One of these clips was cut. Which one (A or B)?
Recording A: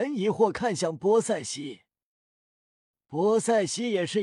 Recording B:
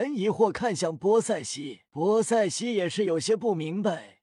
B